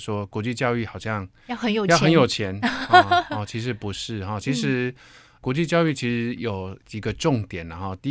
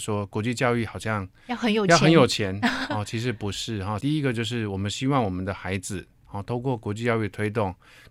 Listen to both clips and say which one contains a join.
second; 2 cuts; at 2.9 s, 4.0 s

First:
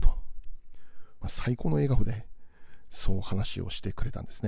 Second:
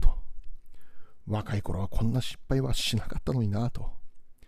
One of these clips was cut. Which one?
first; 1 cut; at 1.2 s

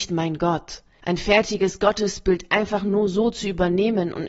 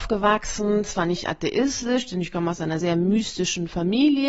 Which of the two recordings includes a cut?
second; 1 cut; at 2.8 s

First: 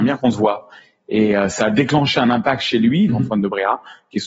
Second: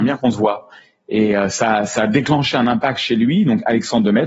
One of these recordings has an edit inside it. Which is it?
first; 2 cuts; at 1.5 s, 3.1 s

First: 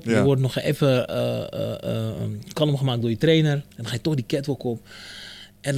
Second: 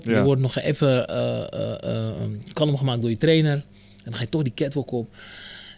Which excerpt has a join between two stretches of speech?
first; 1 cut; at 3.7 s

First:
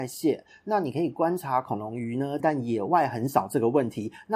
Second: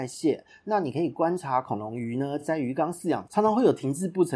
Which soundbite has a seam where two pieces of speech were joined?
first; 1 cut; at 2.4 s

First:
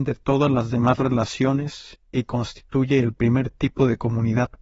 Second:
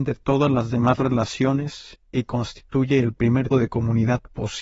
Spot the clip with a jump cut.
second; 1 cut; at 3.5 s

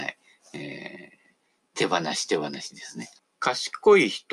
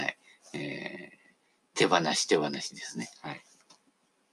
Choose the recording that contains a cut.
first; 1 cut; at 3.2 s

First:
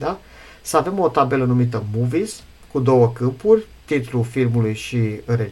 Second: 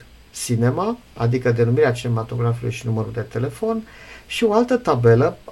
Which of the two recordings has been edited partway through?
second; 1 cut; at 1.1 s

